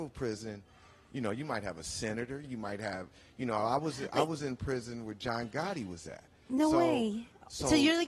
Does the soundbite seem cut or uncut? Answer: cut